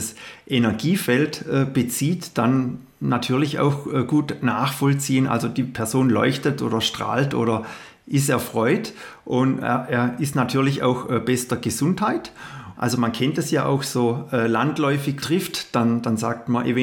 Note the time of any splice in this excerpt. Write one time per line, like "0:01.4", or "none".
0:12.7
0:15.2